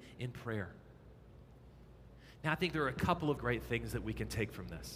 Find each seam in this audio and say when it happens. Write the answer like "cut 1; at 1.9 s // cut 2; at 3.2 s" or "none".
cut 1; at 3.4 s